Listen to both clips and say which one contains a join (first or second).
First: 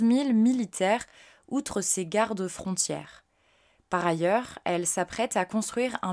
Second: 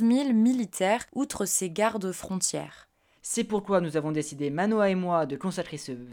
second